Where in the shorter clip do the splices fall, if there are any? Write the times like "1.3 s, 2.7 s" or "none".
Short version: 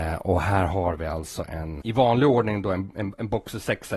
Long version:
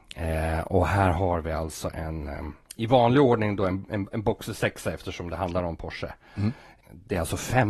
1.8 s